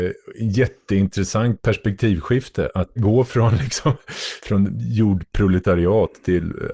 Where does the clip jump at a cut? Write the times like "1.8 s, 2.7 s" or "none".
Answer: 3.0 s